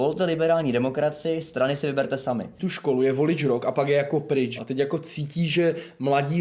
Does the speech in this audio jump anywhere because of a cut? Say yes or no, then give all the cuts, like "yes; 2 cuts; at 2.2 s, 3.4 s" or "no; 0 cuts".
yes; 2 cuts; at 2.6 s, 4.6 s